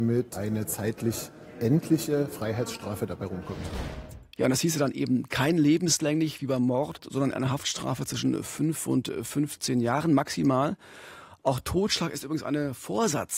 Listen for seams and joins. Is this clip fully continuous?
yes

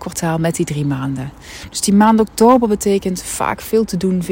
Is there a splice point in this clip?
no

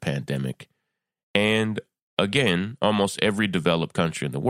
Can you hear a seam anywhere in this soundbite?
no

